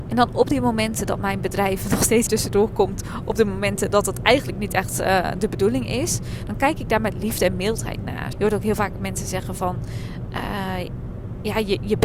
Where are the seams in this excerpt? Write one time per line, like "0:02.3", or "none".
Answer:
0:02.3
0:08.3